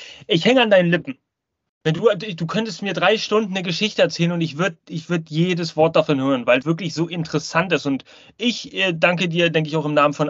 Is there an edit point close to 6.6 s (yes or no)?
yes